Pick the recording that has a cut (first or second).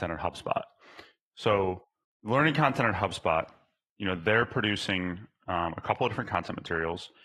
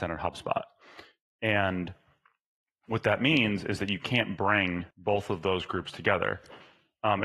second